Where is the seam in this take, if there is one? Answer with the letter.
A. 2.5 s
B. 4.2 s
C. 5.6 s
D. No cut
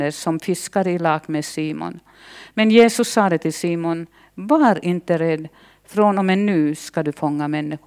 D